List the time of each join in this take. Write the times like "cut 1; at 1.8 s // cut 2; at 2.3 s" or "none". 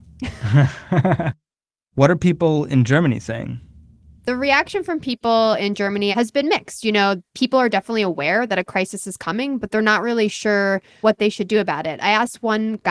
cut 1; at 6.1 s